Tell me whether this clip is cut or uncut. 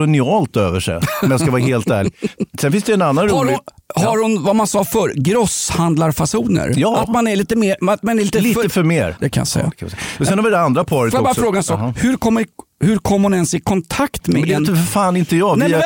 cut